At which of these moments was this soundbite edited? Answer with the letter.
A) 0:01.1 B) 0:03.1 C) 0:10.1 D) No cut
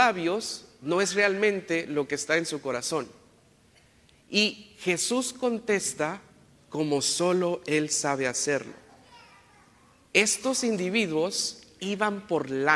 D